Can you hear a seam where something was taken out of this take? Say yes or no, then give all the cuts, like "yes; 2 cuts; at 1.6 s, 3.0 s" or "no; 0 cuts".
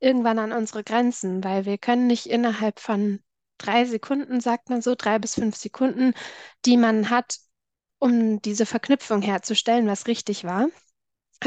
no; 0 cuts